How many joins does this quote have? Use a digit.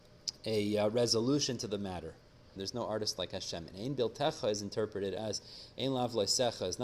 1